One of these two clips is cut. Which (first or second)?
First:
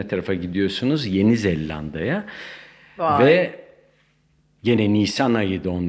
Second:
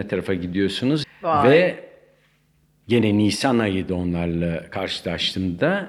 second